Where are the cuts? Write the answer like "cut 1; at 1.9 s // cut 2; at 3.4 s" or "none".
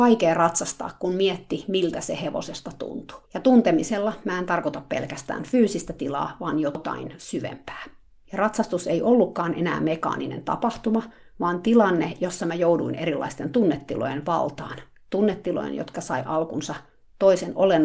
cut 1; at 3.2 s // cut 2; at 8.2 s